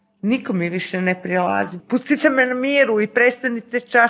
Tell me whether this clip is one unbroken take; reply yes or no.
no